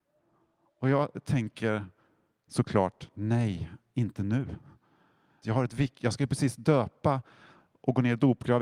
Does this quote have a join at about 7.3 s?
no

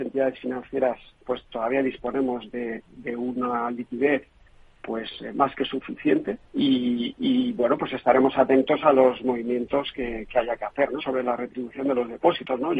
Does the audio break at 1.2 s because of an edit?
no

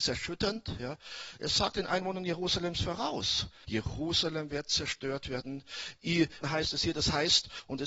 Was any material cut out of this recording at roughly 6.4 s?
yes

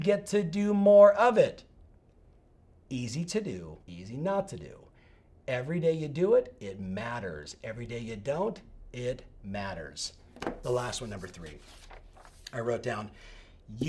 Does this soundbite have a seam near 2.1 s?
no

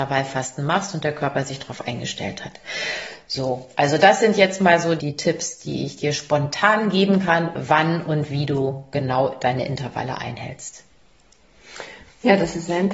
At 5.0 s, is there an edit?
yes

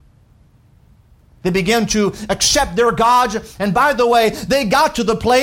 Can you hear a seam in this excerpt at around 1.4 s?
yes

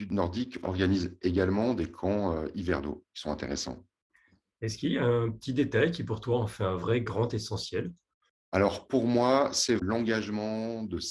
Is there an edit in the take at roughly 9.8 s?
yes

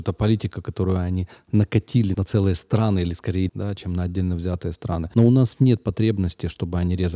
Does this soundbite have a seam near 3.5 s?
yes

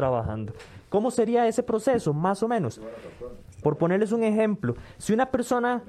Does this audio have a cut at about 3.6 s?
yes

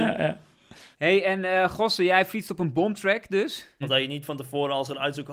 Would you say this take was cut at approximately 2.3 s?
no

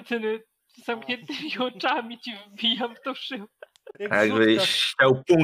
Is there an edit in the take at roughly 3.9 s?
yes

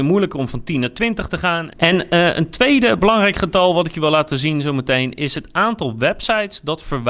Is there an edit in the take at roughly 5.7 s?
no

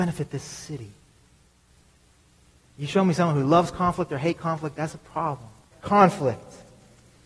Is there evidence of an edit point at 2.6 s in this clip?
yes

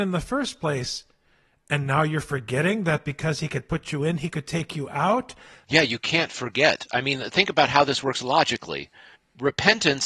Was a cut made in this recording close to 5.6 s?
yes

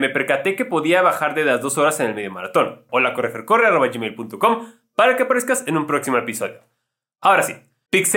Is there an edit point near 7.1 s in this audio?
no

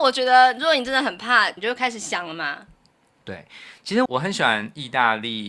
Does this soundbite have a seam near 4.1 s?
yes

